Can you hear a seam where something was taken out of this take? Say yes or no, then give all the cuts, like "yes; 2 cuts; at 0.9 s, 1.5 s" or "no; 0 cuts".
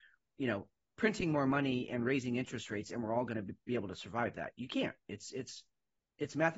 no; 0 cuts